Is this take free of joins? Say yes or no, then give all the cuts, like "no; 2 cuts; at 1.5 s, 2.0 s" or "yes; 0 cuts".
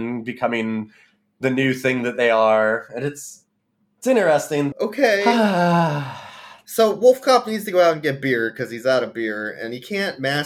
no; 1 cut; at 4.7 s